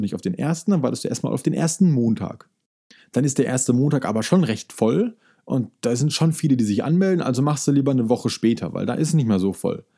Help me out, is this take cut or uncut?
uncut